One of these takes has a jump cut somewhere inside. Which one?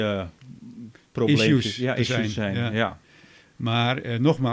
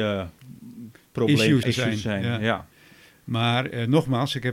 second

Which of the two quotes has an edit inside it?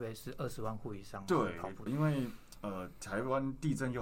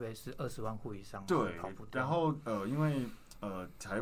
first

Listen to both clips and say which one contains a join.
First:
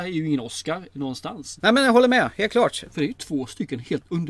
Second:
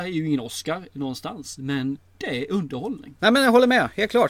first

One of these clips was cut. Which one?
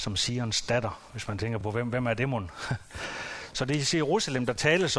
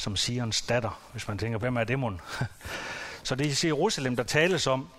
second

